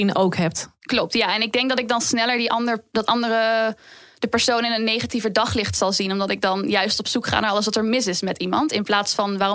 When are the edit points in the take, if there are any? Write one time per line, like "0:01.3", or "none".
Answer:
none